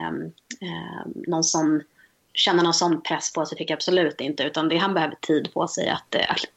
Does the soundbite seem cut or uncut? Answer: uncut